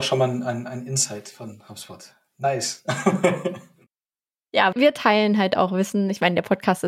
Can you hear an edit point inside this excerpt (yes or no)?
no